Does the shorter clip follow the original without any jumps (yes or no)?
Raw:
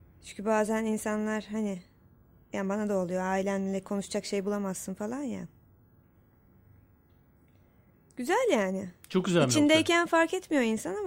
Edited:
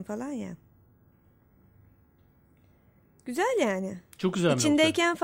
yes